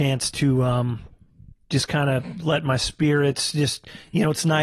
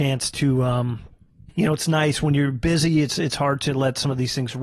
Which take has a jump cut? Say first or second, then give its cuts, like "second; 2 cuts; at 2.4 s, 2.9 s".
second; 1 cut; at 1.5 s